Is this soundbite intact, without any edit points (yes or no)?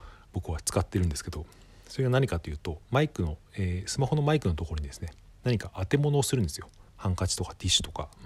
no